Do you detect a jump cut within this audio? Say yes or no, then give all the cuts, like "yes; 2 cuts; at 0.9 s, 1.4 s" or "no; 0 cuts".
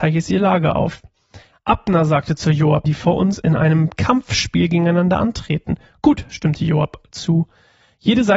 yes; 1 cut; at 2.8 s